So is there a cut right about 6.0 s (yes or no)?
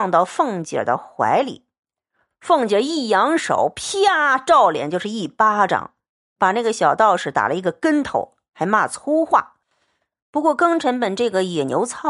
no